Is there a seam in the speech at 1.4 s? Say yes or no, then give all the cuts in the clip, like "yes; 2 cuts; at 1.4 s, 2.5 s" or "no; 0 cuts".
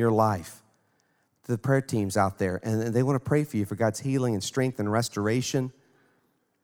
yes; 1 cut; at 1.4 s